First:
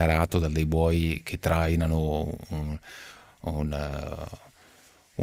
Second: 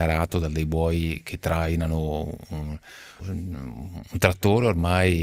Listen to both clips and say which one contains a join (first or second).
second